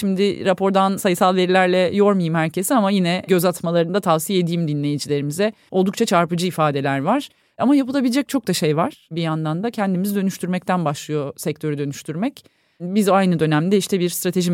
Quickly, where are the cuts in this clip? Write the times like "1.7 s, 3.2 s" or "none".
5.7 s